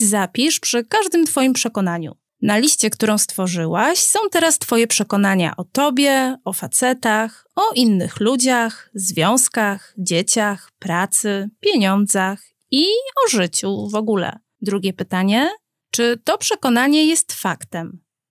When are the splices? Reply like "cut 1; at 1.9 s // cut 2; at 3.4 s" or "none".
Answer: cut 1; at 2.3 s // cut 2; at 14.6 s